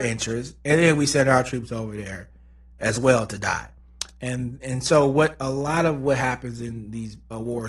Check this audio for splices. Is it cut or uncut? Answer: uncut